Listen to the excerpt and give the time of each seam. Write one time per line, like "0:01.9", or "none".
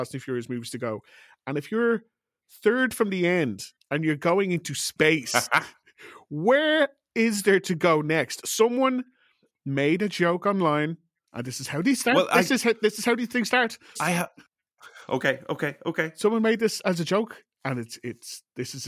0:14.0